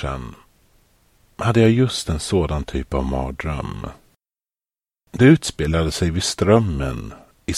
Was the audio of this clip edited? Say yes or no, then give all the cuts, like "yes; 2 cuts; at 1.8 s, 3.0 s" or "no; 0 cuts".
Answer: no; 0 cuts